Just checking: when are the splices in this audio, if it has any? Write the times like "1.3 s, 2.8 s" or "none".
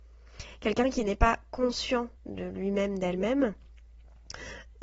2.2 s